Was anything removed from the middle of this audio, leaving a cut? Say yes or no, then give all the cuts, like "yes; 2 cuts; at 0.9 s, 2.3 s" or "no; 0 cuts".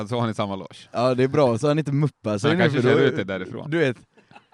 no; 0 cuts